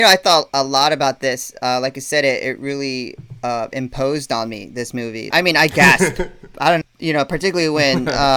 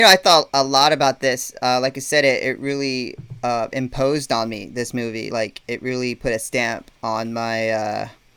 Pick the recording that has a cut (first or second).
first